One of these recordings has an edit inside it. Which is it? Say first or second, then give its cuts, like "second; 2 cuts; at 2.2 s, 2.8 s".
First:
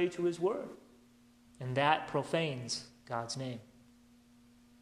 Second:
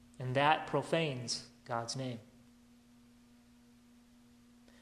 first; 1 cut; at 1.5 s